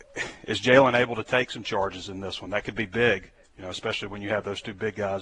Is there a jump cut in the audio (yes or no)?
no